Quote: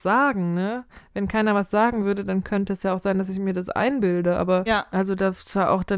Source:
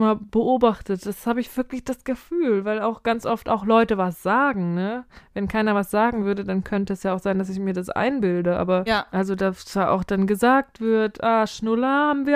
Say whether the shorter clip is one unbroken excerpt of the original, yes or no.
yes